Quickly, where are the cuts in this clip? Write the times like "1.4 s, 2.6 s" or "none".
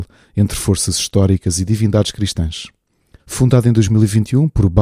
3.2 s